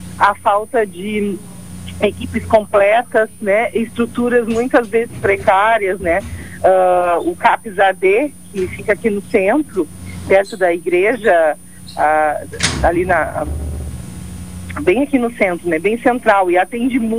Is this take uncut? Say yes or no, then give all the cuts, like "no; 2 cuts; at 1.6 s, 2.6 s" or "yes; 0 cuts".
yes; 0 cuts